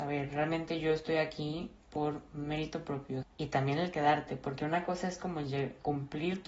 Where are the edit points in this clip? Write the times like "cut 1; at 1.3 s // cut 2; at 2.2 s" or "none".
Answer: cut 1; at 3.2 s